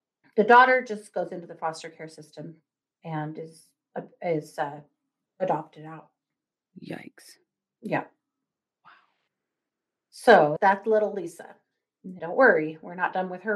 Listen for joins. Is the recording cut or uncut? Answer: cut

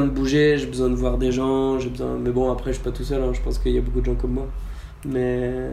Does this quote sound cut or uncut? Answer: uncut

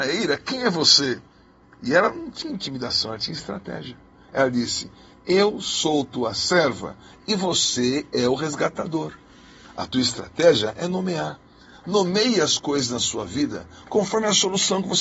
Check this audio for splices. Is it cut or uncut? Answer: uncut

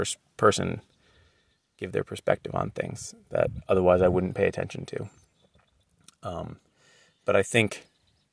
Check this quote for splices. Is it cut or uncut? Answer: uncut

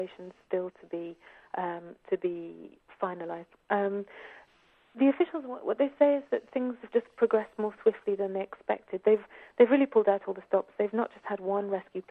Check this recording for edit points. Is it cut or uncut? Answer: uncut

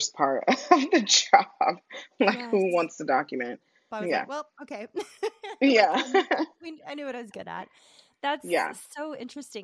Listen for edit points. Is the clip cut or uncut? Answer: cut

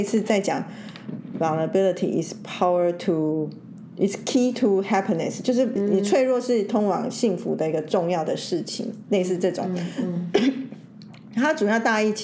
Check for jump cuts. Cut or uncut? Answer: cut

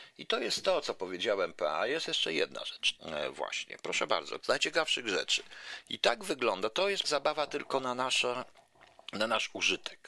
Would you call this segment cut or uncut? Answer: cut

